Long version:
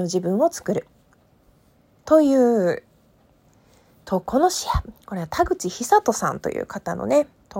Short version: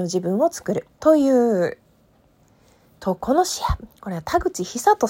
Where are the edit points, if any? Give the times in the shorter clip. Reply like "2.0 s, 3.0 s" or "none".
0.9 s